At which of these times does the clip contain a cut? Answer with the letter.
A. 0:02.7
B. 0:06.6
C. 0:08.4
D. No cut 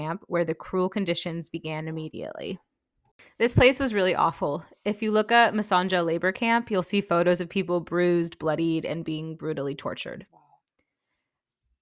D